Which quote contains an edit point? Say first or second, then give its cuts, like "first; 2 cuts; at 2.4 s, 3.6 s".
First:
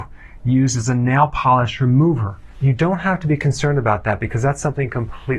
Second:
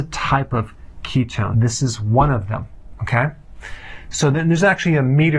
second; 1 cut; at 1.5 s